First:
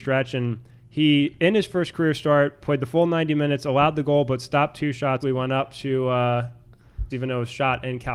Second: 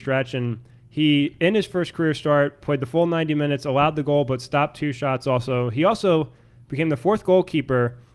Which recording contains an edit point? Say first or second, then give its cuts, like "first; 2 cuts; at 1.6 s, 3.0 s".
first; 2 cuts; at 5.2 s, 7.1 s